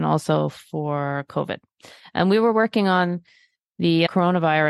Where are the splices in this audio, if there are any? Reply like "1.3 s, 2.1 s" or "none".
none